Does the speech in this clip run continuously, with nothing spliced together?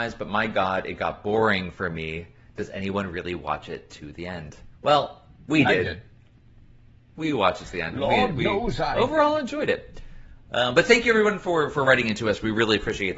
yes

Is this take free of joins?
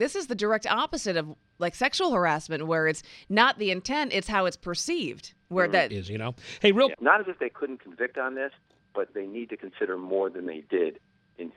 no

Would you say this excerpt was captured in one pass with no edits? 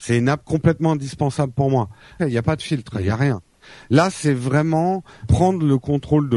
no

